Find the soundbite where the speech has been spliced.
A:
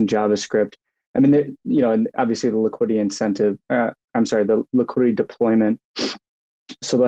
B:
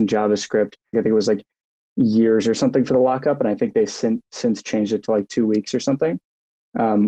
B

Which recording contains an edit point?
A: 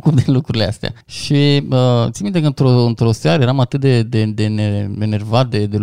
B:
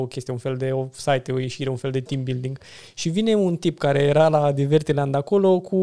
A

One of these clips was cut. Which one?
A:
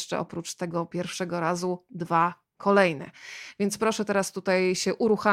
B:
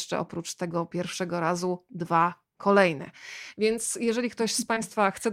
B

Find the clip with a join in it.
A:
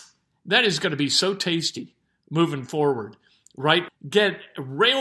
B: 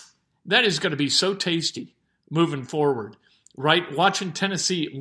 A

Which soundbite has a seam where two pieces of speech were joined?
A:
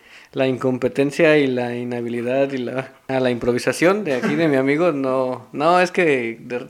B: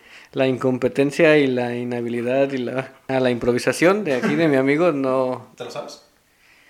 B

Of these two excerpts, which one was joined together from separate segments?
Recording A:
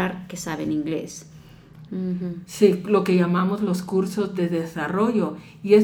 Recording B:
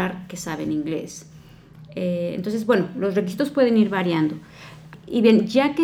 A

